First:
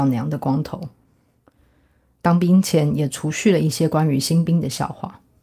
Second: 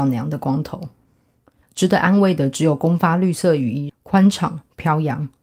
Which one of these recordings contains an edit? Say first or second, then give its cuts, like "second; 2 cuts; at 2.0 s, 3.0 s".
second; 2 cuts; at 1.6 s, 3.9 s